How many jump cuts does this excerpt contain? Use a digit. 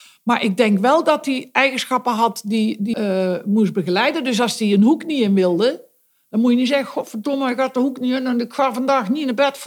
1